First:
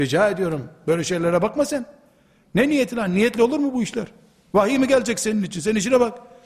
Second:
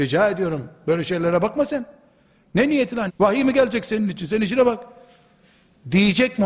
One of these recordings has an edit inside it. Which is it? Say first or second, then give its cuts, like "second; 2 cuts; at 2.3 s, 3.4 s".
second; 1 cut; at 3.1 s